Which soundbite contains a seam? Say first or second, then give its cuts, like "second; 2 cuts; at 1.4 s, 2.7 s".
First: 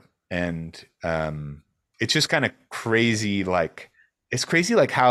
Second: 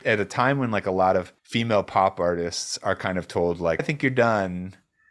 second; 2 cuts; at 1.4 s, 3.8 s